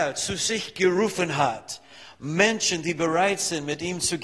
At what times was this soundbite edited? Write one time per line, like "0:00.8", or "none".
none